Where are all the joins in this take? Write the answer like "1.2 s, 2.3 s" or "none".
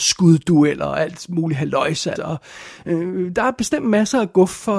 2.2 s